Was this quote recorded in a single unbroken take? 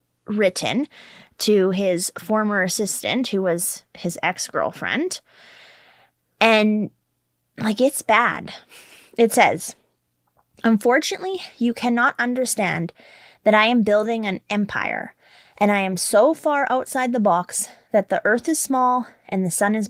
yes; 0 cuts

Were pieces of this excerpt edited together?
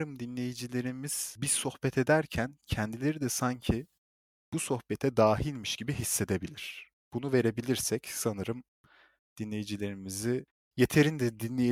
no; 0 cuts

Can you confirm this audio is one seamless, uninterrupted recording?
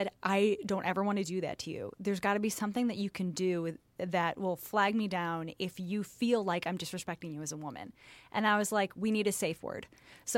yes; 0 cuts

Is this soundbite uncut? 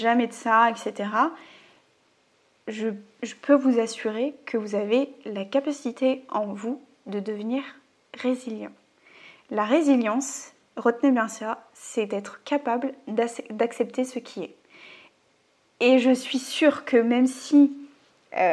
yes; 0 cuts

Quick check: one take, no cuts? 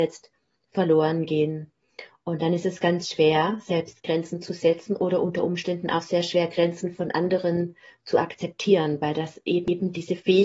yes; 0 cuts

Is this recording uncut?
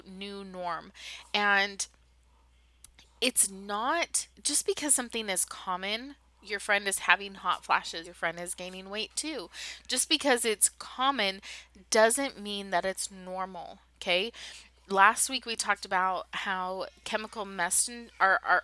no; 2 cuts; at 4.3 s, 8.0 s

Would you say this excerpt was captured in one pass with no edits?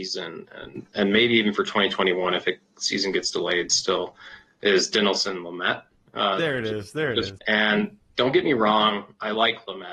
no; 2 cuts; at 6.1 s, 7.4 s

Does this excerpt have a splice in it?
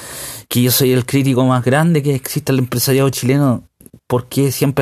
no; 0 cuts

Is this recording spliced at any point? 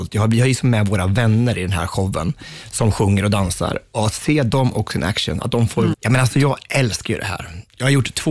yes; 1 cut; at 5.9 s

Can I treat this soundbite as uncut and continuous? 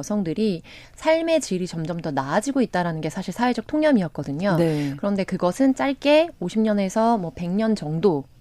yes; 0 cuts

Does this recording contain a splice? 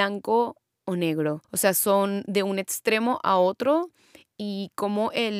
yes; 1 cut; at 1.4 s

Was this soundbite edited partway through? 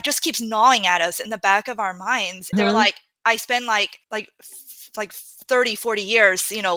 yes; 2 cuts; at 2.5 s, 4.0 s

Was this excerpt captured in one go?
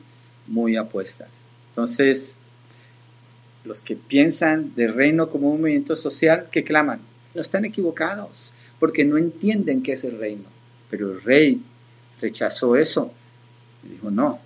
no; 2 cuts; at 7.4 s, 10.7 s

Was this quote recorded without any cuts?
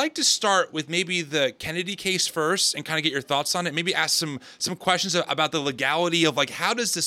yes; 0 cuts

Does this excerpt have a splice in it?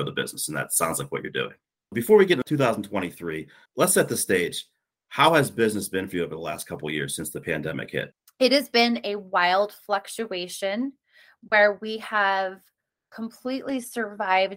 yes; 1 cut; at 3.7 s

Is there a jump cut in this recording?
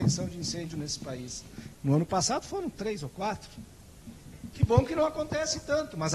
yes; 2 cuts; at 1.7 s, 4.5 s

